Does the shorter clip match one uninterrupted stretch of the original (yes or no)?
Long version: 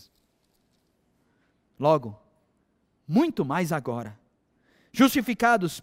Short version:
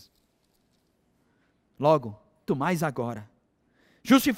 no